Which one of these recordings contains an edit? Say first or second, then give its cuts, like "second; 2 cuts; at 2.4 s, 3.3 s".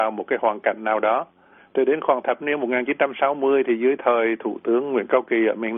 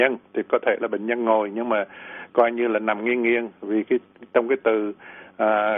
first; 1 cut; at 1.6 s